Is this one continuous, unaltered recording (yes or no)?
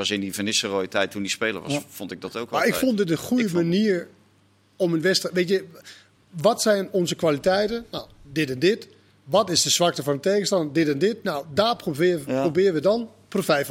yes